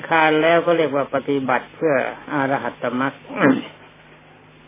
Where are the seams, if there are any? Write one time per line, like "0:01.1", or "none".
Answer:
none